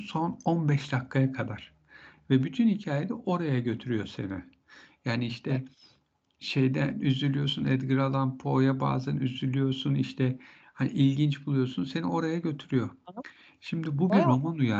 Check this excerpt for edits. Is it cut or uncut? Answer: uncut